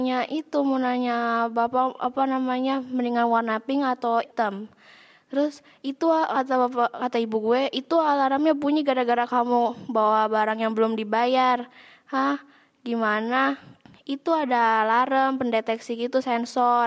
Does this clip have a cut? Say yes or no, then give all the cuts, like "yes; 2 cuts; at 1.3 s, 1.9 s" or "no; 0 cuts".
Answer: no; 0 cuts